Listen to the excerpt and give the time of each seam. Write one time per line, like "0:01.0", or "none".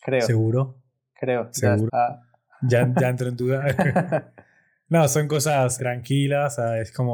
0:01.9
0:05.8

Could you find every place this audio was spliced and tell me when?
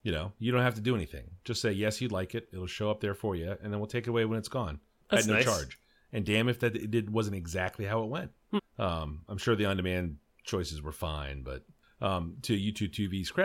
0:08.6

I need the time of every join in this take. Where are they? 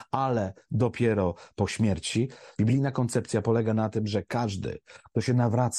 0:02.6

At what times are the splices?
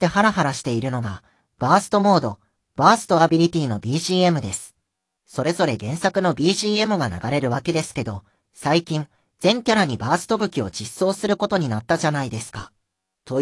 0:05.1

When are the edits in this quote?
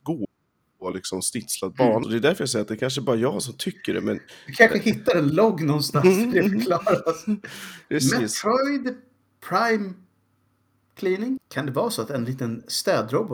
0:02.0
0:11.4

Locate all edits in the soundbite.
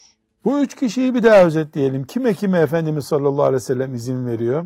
none

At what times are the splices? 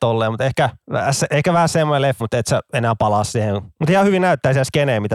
0:02.2

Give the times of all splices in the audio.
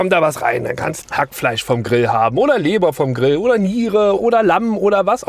0:01.0
0:04.2

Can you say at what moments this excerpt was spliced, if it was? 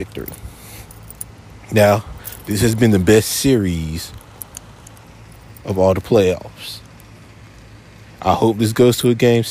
none

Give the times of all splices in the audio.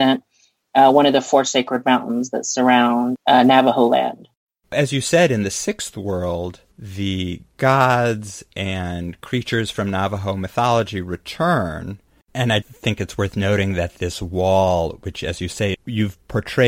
0:12.2
0:15.7

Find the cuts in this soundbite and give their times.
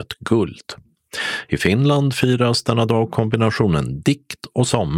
none

